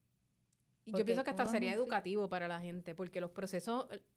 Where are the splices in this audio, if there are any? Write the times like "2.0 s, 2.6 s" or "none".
none